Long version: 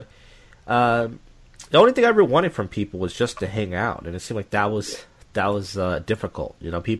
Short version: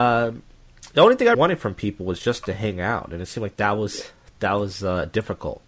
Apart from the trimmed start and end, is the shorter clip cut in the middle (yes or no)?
yes